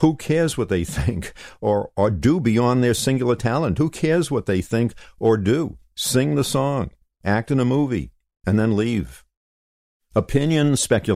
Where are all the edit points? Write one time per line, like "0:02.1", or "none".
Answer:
none

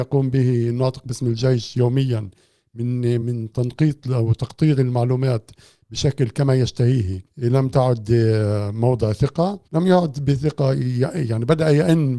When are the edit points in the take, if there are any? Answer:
0:03.2
0:07.3
0:09.7

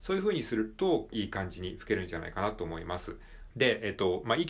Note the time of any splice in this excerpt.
0:01.1
0:03.5

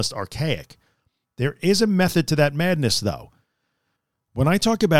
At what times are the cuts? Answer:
none

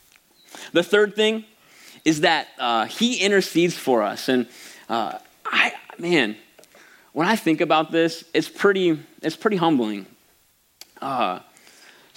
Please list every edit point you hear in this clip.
none

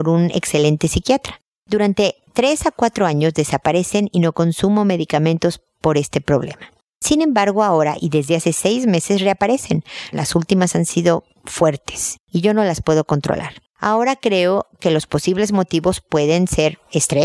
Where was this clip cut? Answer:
0:10.1
0:13.7

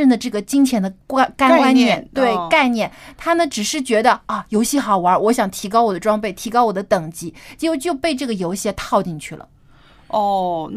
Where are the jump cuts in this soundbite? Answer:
none

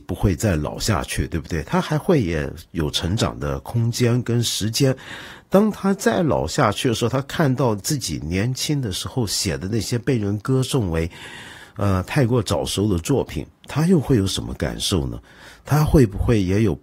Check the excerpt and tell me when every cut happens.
none

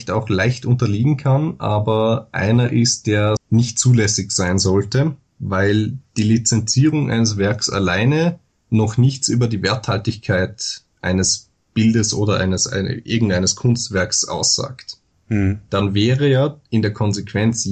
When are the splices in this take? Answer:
0:03.4

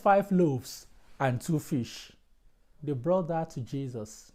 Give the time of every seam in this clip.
0:02.8

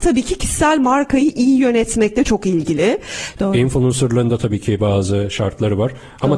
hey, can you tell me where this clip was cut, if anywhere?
0:03.4

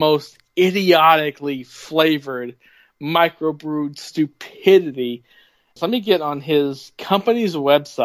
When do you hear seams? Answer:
0:05.8

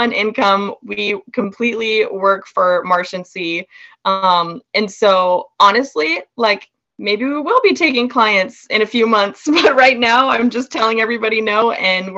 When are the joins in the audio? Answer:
none

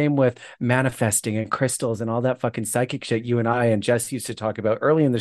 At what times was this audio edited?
none

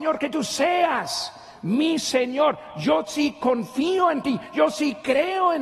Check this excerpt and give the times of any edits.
none

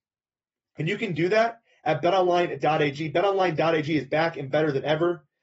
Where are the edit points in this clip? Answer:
none

